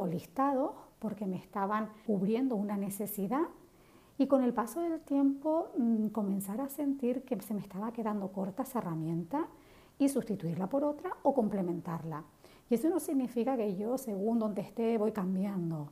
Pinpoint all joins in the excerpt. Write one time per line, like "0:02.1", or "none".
0:02.1